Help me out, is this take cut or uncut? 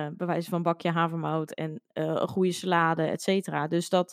uncut